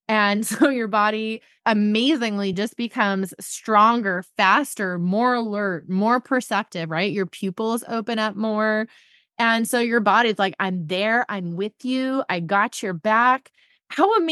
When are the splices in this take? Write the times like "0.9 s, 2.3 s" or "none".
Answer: none